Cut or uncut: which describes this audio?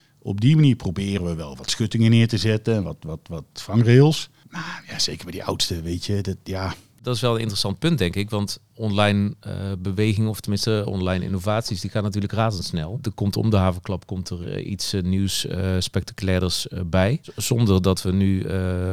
cut